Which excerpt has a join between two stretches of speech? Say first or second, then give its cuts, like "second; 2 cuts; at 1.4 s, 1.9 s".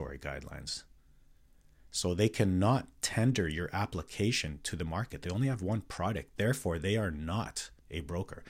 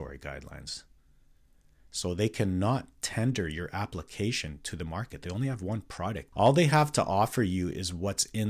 second; 1 cut; at 6.3 s